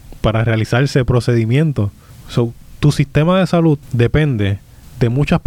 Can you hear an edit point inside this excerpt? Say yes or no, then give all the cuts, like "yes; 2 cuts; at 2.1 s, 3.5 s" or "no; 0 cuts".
yes; 1 cut; at 2.2 s